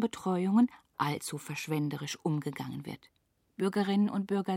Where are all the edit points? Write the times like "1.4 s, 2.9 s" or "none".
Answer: 3.5 s

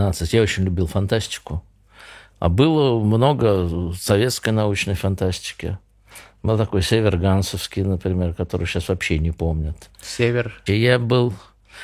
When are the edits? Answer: 10.7 s

